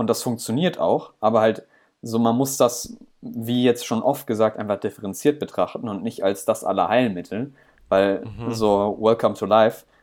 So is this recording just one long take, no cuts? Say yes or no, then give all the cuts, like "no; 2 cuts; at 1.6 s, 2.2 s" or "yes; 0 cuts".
yes; 0 cuts